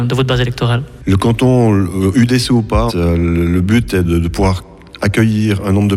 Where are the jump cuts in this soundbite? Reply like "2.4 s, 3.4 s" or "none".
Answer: 2.9 s, 4.0 s